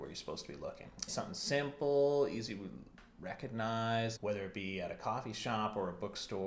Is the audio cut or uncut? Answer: cut